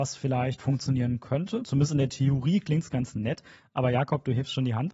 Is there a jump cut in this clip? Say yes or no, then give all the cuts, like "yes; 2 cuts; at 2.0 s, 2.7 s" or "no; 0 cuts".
no; 0 cuts